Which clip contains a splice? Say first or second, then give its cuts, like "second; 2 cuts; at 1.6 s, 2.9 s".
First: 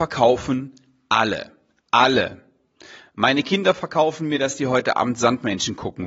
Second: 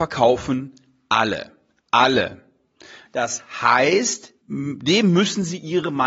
second; 2 cuts; at 3.1 s, 4.4 s